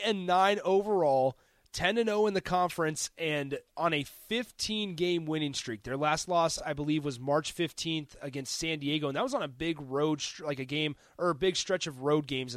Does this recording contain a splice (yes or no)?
no